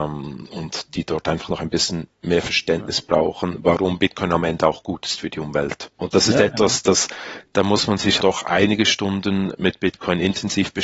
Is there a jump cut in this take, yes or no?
yes